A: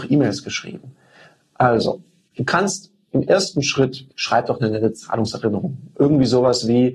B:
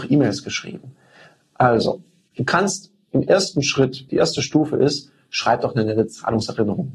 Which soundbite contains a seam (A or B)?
A